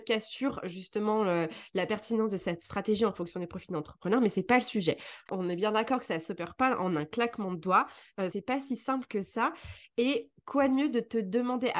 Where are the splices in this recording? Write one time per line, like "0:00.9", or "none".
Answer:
0:05.3
0:08.3